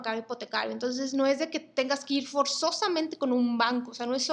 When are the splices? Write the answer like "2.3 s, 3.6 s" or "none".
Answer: none